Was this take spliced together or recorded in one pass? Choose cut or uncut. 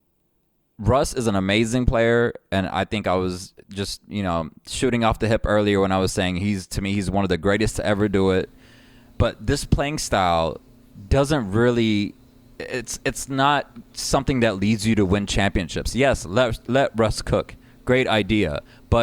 cut